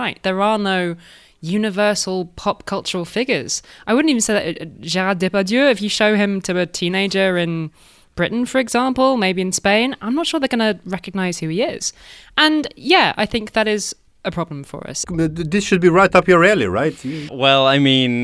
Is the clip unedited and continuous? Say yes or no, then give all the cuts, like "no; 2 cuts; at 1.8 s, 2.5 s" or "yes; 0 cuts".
no; 2 cuts; at 15.0 s, 17.3 s